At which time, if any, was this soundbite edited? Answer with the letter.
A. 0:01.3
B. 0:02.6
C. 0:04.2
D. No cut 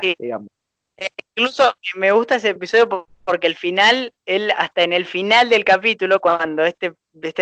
B